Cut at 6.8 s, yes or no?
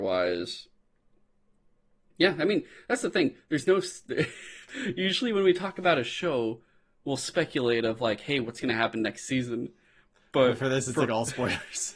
no